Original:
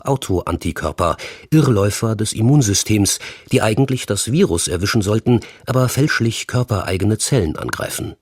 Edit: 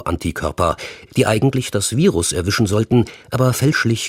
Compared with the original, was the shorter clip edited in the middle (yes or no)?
yes